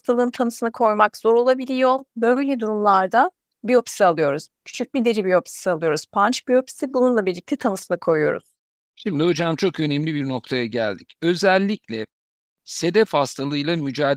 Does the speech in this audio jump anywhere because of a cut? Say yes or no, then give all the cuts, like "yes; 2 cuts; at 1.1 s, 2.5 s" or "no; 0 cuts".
no; 0 cuts